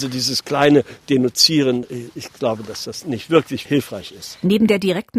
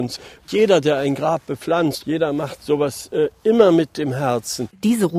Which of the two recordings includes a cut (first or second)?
second